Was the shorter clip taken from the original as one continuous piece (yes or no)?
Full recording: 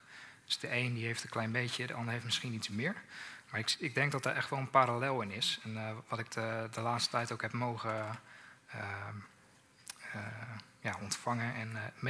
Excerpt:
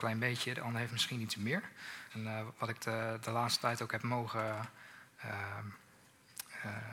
no